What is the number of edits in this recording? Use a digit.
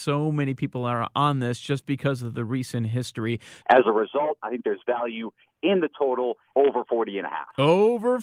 2